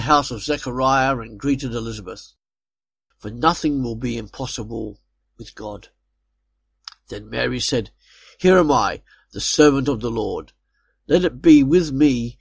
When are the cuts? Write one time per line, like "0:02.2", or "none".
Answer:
0:03.1